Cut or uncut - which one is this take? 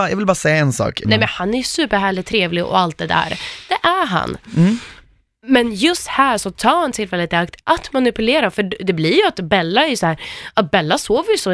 cut